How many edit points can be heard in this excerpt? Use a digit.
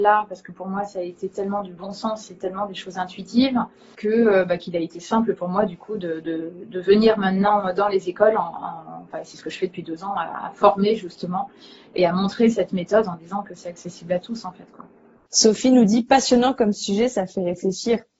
0